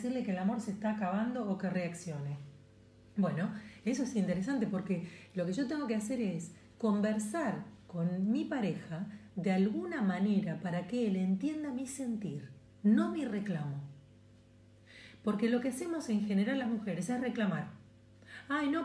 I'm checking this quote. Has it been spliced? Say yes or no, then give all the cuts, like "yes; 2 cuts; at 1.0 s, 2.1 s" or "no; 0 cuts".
yes; 1 cut; at 7.8 s